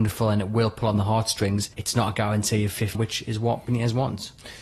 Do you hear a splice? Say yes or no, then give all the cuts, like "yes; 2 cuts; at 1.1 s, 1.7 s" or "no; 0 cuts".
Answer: yes; 2 cuts; at 1.7 s, 2.9 s